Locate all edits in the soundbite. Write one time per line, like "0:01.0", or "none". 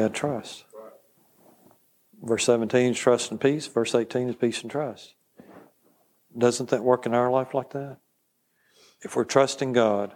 none